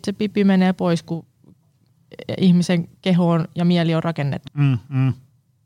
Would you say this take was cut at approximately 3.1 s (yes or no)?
no